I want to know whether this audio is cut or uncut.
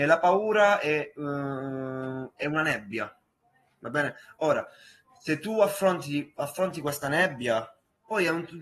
uncut